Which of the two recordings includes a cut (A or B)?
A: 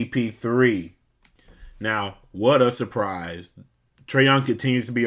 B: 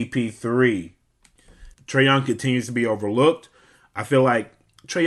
B